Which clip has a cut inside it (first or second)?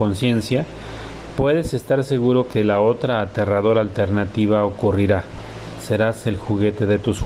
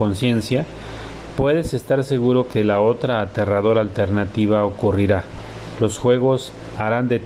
second